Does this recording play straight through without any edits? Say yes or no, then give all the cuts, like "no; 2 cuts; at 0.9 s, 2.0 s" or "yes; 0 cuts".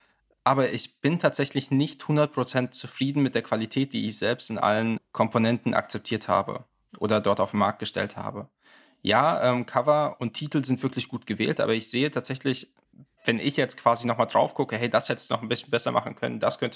yes; 0 cuts